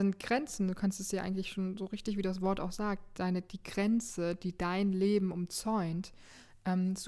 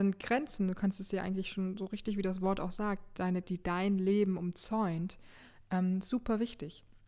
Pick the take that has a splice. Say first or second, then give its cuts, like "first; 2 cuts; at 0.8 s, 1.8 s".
second; 1 cut; at 3.4 s